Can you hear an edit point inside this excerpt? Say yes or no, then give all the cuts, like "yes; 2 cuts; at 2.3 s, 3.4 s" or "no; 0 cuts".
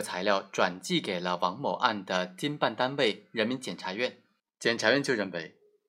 yes; 1 cut; at 4.4 s